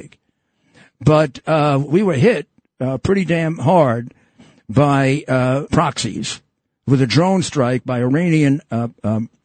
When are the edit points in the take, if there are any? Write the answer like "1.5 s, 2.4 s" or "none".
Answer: 1.9 s, 5.7 s